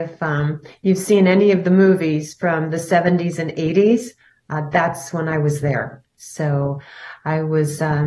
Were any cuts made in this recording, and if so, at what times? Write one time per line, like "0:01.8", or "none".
0:06.1